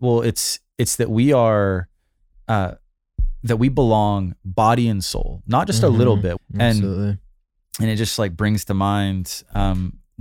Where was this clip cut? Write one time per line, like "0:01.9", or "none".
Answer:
0:06.4

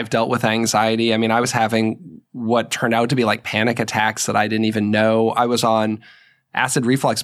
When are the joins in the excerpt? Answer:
none

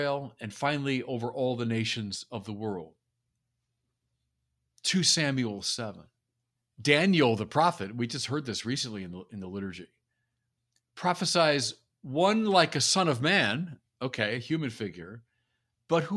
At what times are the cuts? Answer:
0:06.6

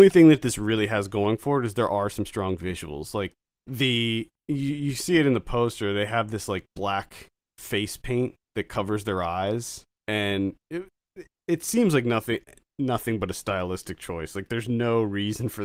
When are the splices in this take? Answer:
none

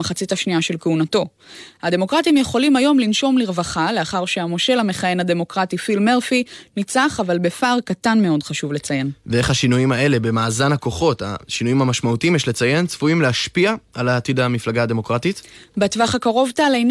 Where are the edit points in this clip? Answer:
0:01.8

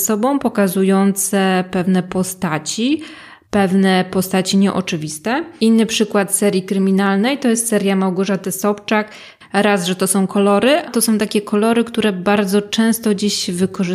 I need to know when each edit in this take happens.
0:09.4
0:10.9

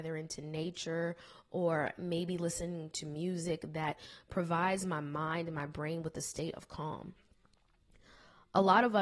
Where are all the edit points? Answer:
none

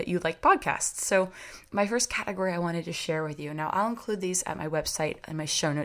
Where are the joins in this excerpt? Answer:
0:01.7

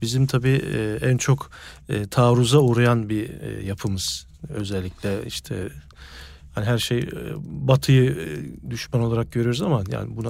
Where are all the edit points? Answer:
none

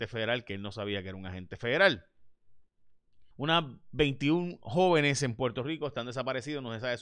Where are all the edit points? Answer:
0:03.3

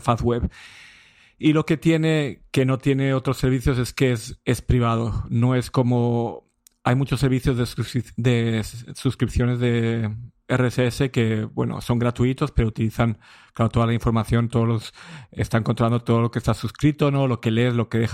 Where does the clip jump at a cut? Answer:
none

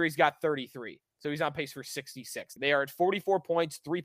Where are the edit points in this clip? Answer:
0:02.6

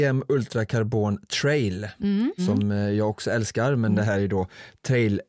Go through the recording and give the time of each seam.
0:02.4

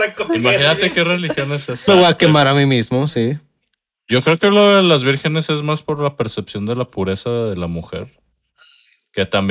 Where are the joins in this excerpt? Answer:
0:01.9

